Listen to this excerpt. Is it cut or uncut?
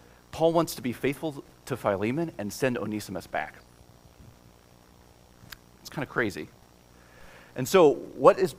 uncut